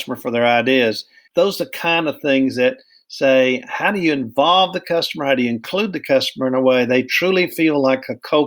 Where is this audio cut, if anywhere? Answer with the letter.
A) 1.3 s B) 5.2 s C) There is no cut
A